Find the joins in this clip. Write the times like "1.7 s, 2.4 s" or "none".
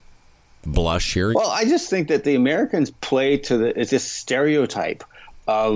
1.3 s, 3.9 s